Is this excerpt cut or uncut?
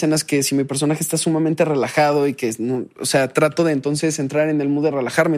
uncut